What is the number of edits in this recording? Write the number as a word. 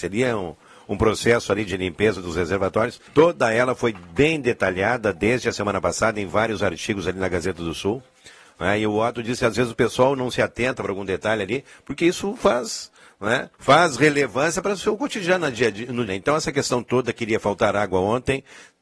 three